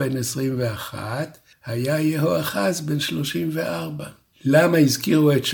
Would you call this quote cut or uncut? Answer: cut